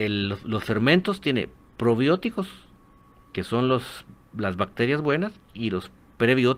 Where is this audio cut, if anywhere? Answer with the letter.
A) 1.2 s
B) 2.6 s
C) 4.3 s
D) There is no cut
D